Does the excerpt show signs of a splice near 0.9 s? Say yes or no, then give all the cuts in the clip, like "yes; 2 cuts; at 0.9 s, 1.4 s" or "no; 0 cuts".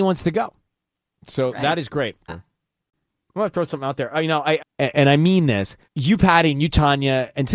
no; 3 cuts; at 2.3 s, 4.6 s, 5.8 s